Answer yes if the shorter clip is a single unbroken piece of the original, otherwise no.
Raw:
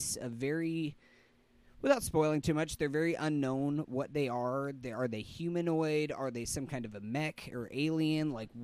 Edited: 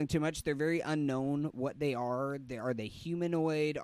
yes